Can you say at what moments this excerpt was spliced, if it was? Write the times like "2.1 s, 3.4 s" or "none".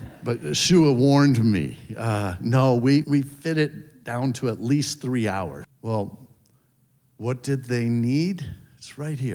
3.0 s, 5.6 s

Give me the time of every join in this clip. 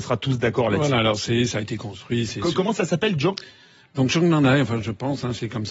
none

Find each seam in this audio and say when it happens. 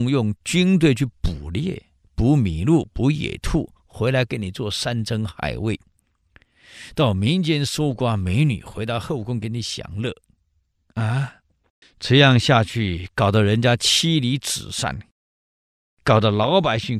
11.8 s

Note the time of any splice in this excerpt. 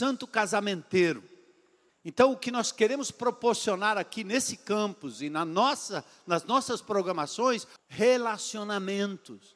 1.9 s, 7.8 s

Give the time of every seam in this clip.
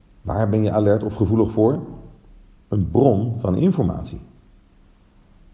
2.5 s

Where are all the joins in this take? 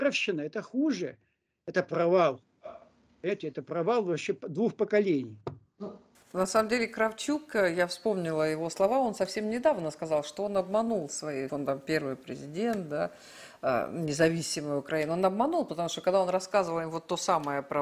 11.5 s

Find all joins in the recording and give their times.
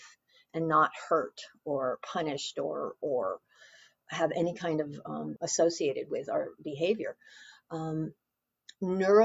5.4 s

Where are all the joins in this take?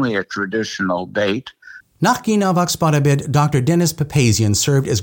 1.8 s

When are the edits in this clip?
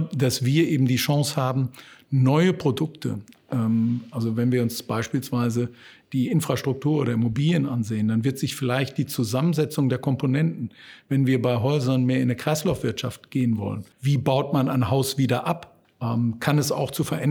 13.9 s, 15.8 s

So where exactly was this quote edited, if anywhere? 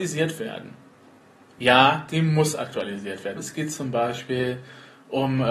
3.4 s

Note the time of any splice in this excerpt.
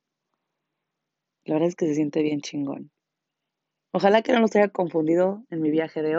3.9 s

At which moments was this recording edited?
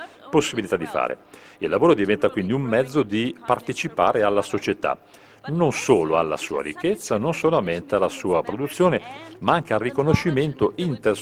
none

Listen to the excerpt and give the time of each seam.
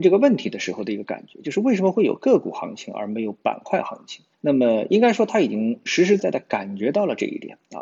4.3 s, 6.2 s

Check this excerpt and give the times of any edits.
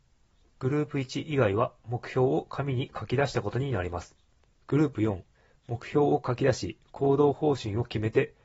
4.4 s

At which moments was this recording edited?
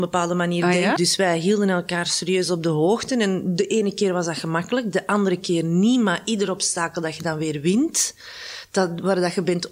1.0 s

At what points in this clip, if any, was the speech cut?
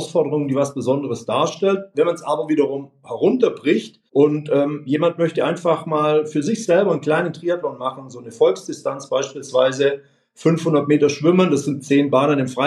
4.1 s

